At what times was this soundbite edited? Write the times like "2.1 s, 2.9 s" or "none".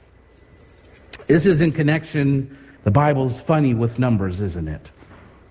2.8 s